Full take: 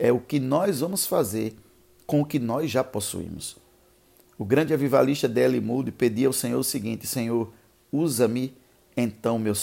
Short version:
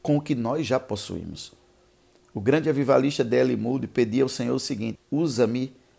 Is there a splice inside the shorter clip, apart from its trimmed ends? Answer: yes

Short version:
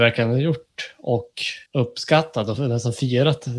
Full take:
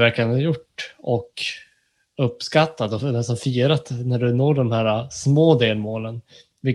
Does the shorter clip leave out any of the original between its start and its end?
yes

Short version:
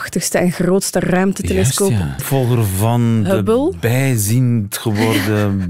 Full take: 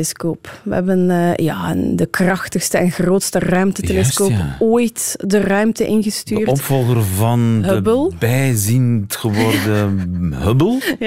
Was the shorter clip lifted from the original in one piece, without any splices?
no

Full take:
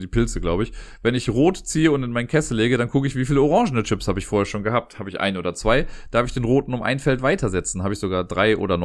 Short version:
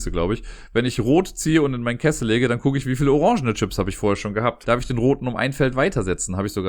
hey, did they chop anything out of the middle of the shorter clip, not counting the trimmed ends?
yes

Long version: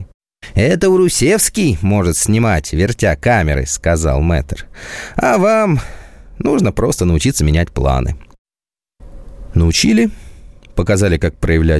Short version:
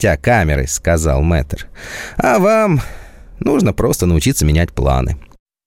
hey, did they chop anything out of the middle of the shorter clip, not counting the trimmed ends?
no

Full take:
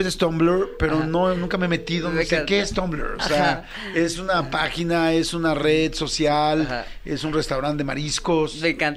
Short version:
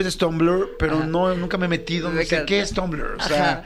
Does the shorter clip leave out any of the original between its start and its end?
no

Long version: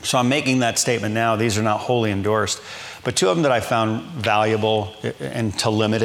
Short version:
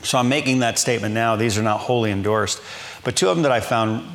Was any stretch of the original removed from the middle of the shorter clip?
no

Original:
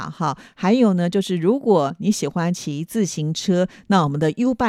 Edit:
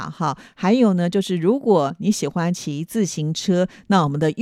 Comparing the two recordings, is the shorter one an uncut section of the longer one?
yes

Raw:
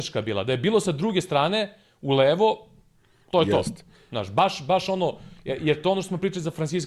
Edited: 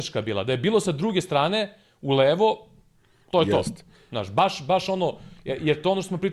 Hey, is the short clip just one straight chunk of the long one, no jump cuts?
yes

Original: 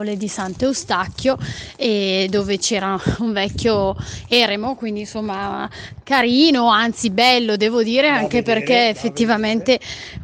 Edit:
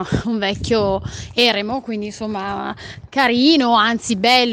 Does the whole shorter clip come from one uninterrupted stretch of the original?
yes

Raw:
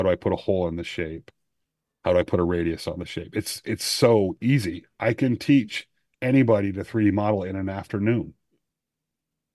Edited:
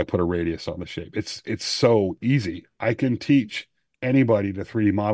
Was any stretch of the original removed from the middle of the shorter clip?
no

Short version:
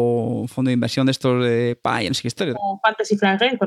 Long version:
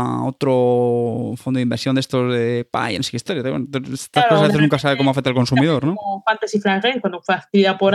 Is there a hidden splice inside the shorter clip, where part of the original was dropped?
yes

